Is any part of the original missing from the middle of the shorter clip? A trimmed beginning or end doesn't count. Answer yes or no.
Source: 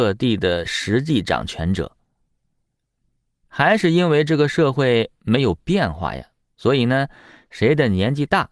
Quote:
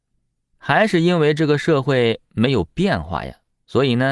no